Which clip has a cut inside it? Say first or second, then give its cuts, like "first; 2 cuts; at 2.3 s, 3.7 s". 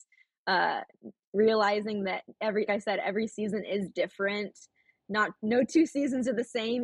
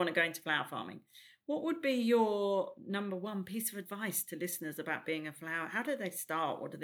first; 1 cut; at 2.7 s